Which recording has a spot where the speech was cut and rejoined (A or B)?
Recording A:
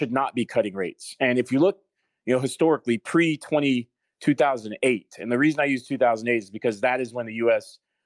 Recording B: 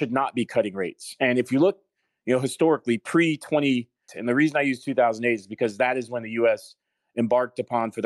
B